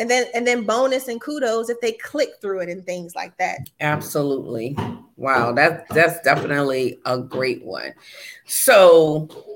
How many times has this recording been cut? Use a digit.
1